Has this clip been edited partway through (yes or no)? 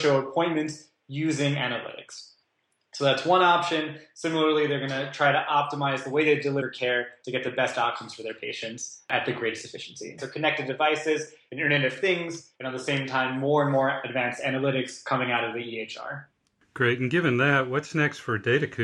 yes